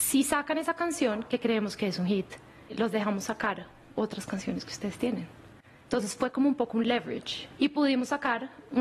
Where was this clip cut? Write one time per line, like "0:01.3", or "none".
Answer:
0:02.7
0:07.6